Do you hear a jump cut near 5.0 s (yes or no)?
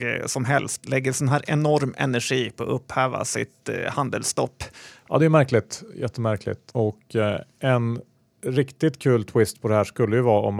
yes